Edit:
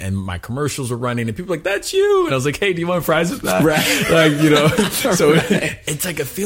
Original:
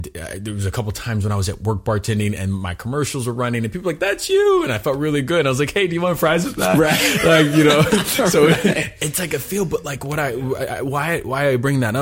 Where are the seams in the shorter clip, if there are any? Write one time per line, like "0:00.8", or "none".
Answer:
0:02.3